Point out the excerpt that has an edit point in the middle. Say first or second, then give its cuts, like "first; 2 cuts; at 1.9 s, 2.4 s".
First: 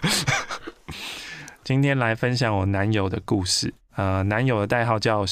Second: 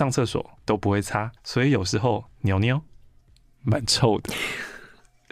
second; 1 cut; at 1.4 s